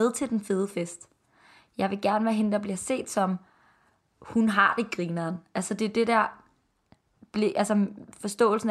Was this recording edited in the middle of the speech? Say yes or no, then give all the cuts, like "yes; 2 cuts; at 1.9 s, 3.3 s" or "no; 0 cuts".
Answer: no; 0 cuts